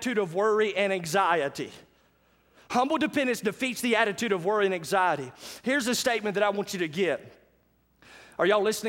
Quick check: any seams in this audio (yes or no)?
no